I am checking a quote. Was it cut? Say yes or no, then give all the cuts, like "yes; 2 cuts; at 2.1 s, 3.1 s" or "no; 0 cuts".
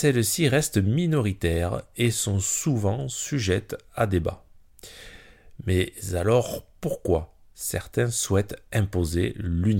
no; 0 cuts